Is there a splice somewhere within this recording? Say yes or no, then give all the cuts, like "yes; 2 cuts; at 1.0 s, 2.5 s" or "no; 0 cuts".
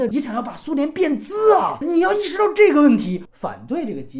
yes; 1 cut; at 3.3 s